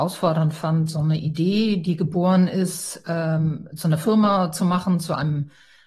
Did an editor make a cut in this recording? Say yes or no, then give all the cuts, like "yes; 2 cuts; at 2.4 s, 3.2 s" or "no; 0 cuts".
no; 0 cuts